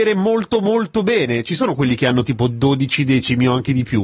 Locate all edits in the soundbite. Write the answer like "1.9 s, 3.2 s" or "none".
none